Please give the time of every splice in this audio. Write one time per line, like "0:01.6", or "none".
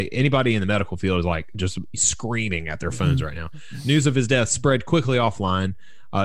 none